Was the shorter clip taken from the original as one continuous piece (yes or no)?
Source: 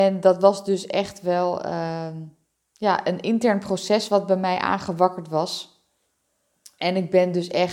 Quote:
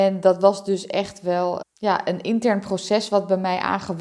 no